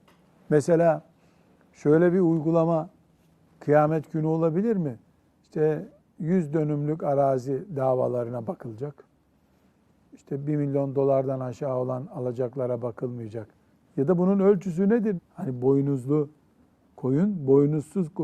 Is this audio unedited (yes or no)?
no